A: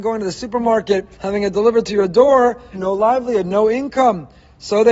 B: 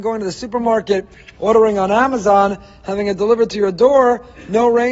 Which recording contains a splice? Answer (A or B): A